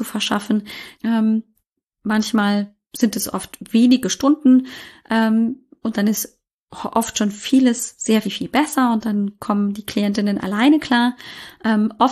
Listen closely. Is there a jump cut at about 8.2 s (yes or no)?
yes